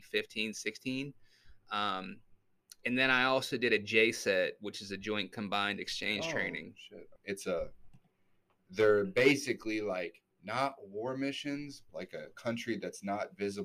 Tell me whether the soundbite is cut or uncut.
cut